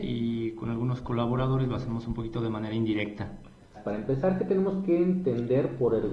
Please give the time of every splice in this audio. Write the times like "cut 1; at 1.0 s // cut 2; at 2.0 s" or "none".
cut 1; at 3.7 s